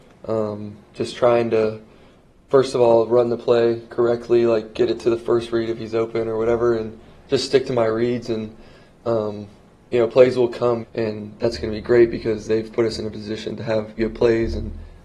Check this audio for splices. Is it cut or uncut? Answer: cut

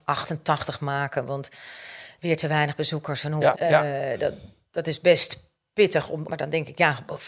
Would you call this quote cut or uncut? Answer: cut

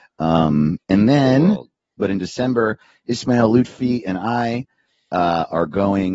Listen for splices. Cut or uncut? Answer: cut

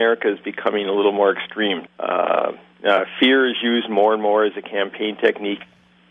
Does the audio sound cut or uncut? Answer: cut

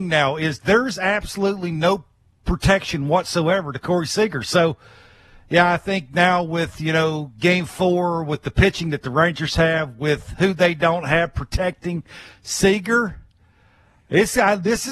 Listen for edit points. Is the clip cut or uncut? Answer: uncut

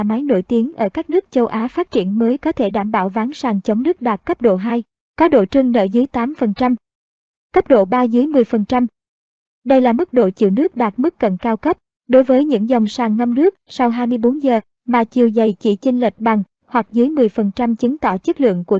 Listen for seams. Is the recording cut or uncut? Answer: uncut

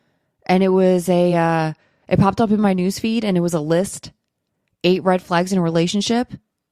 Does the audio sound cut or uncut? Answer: uncut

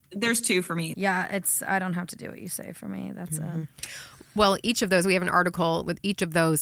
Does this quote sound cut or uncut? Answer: cut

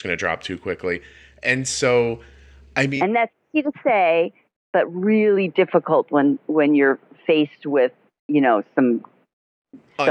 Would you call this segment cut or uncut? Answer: uncut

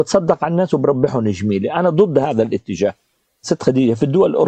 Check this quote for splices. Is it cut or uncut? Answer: uncut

